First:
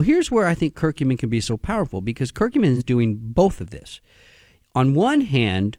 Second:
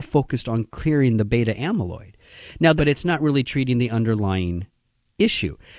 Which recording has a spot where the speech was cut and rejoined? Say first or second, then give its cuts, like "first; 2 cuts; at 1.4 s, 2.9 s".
second; 1 cut; at 2.8 s